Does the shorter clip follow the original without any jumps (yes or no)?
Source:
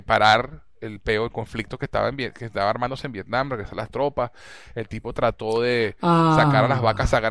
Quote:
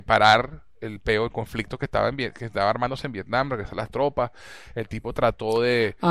yes